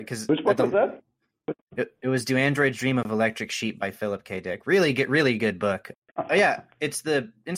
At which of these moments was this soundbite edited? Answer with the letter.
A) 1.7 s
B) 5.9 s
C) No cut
B